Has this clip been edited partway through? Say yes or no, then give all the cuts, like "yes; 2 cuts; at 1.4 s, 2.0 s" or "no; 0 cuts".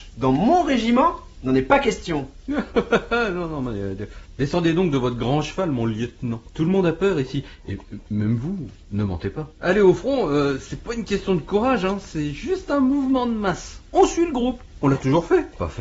no; 0 cuts